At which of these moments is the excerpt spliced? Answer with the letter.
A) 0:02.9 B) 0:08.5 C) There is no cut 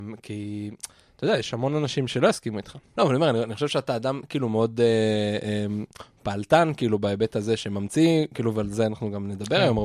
A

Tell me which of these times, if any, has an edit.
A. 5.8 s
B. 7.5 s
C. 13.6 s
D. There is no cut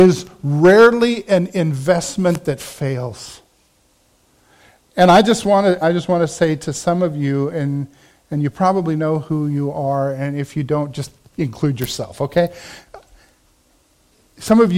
A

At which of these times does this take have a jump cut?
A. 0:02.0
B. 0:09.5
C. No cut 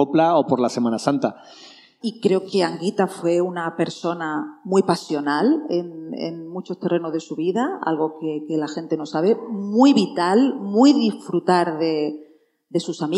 A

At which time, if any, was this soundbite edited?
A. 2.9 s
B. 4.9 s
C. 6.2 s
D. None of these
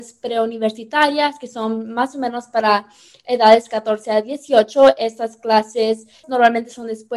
C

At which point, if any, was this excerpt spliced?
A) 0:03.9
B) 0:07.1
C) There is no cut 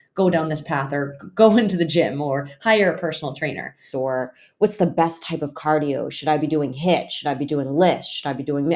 A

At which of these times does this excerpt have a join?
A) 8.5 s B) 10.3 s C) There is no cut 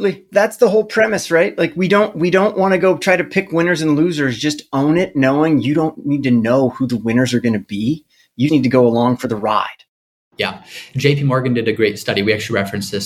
A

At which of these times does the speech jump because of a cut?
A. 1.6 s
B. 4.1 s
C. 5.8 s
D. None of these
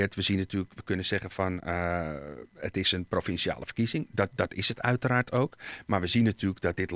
D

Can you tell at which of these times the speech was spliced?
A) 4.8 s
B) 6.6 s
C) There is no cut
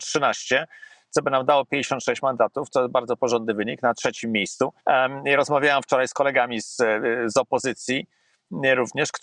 A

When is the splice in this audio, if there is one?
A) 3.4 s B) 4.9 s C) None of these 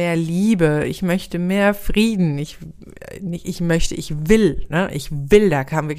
C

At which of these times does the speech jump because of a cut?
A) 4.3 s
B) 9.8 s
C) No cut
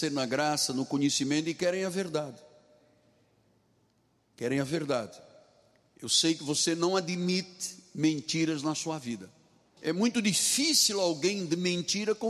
B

